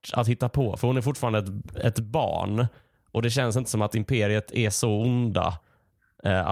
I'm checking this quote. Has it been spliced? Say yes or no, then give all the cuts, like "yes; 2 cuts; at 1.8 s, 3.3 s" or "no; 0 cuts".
no; 0 cuts